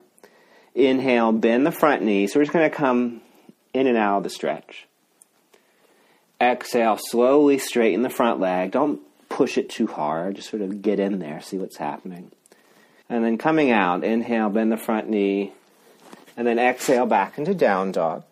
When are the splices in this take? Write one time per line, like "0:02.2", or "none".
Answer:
0:13.0